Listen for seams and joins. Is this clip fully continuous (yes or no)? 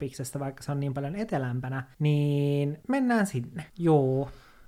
no